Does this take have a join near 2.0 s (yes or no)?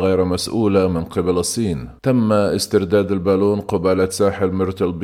yes